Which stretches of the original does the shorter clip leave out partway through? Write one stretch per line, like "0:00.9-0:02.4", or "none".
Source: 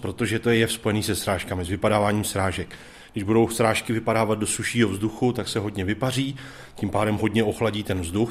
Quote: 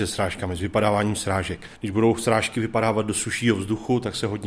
0:02.8-0:03.1